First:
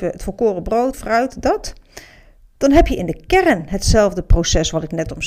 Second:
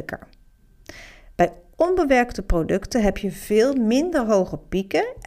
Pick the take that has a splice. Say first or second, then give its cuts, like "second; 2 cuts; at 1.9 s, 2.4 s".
first; 1 cut; at 0.9 s